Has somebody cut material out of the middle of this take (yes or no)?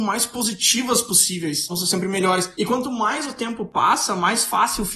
yes